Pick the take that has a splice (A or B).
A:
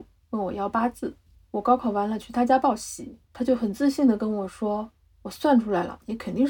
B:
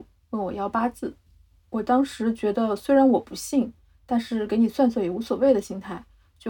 A